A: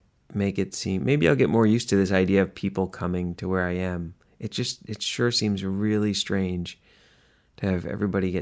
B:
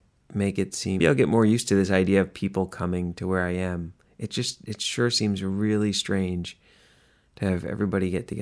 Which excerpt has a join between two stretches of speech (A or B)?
B